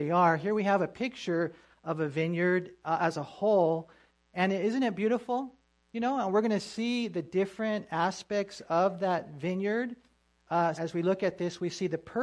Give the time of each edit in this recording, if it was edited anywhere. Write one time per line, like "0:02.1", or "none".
0:10.8